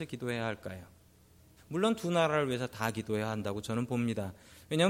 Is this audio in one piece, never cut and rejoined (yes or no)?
no